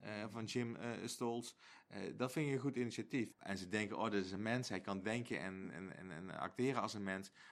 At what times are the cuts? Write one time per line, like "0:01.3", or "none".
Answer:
0:03.3